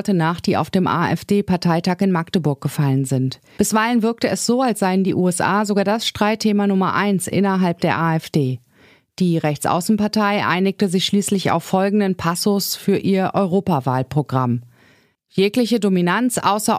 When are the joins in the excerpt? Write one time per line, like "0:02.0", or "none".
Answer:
0:03.6